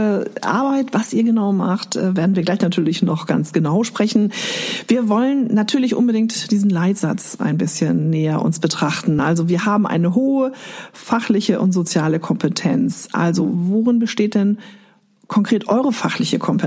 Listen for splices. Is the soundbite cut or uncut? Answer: uncut